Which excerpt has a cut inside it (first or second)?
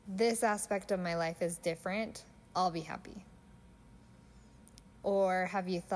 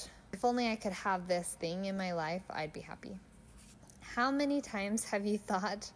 second